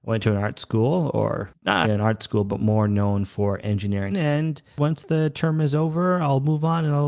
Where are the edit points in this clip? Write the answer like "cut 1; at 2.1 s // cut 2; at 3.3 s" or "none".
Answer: cut 1; at 1.8 s // cut 2; at 4.1 s